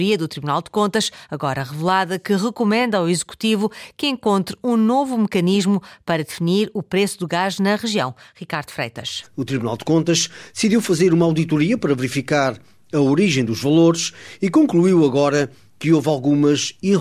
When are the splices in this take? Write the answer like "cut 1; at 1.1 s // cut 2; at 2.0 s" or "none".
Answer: cut 1; at 9.2 s